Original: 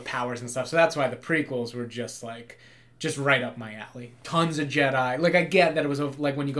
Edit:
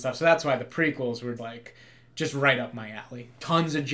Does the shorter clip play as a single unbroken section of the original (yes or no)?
no